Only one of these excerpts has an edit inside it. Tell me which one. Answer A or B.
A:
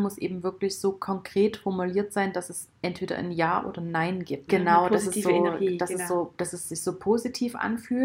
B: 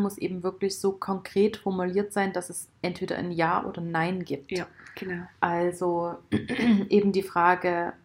A